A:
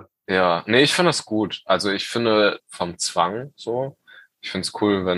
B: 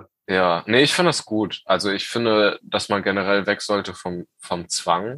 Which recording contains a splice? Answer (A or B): A